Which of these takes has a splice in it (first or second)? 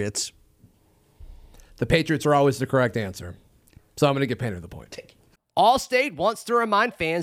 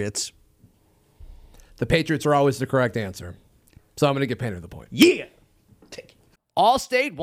first